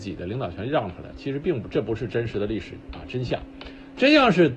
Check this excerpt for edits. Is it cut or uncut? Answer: uncut